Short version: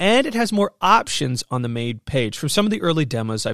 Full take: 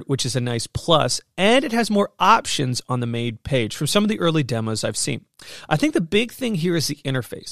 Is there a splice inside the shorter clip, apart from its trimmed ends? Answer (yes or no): no